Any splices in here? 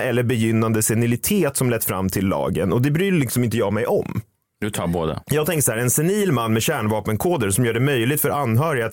yes; 1 cut; at 5.2 s

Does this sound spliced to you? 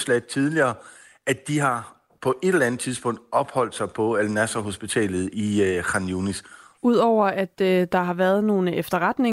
yes; 1 cut; at 6.8 s

